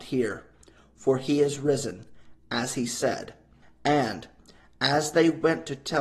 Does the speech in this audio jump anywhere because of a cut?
yes; 1 cut; at 3.6 s

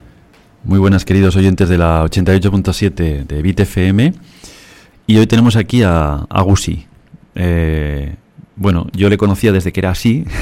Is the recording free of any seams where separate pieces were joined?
no; 1 cut; at 4.9 s

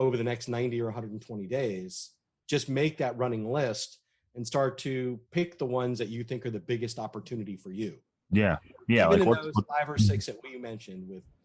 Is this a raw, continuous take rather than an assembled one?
yes; 0 cuts

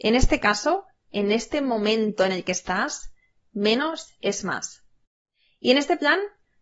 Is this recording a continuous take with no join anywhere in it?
yes; 0 cuts

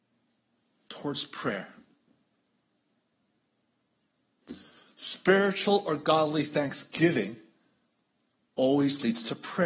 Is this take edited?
no; 0 cuts

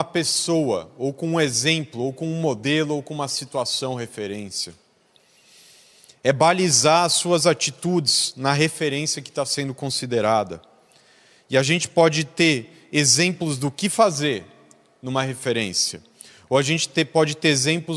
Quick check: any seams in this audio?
no; 0 cuts

